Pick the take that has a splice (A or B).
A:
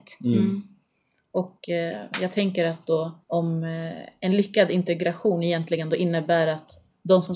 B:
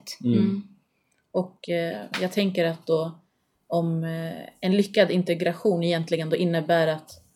A